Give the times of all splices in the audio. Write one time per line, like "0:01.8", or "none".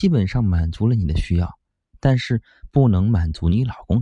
none